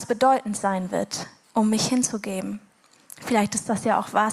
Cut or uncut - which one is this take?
cut